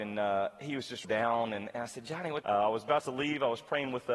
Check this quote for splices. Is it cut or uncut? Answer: cut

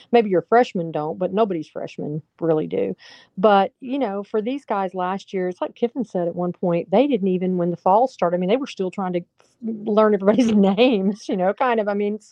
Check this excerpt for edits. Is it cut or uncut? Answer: uncut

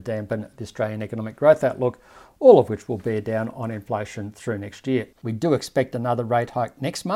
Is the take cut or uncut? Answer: cut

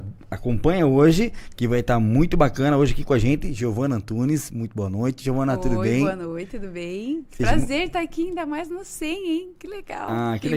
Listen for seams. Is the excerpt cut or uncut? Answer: uncut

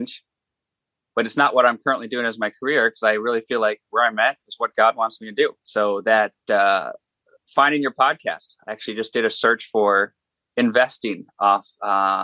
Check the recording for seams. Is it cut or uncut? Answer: cut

